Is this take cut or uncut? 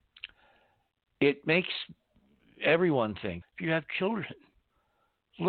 cut